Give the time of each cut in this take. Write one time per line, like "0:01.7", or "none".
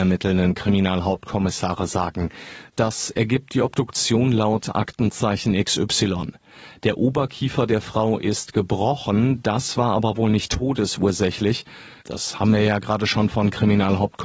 0:02.7
0:12.0

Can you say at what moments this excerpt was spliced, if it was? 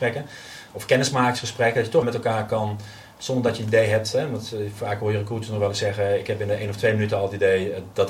0:02.0

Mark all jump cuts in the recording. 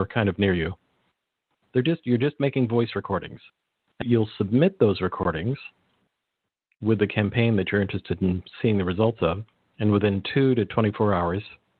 0:01.6

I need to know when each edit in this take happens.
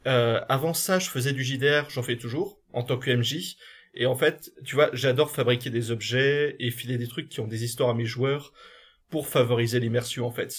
none

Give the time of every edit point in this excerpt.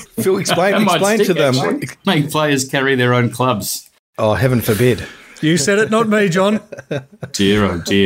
0:02.0

